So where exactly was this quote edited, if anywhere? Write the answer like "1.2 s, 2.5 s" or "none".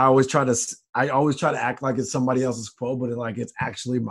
none